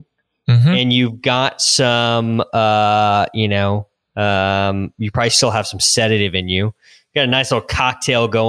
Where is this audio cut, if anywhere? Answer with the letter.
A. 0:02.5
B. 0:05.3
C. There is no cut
C